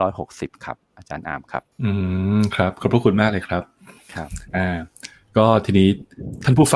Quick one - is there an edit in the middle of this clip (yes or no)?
yes